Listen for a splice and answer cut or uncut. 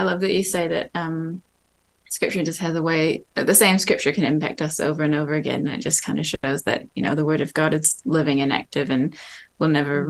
uncut